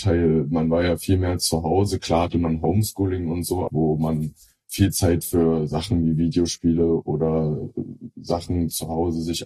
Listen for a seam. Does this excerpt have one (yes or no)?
yes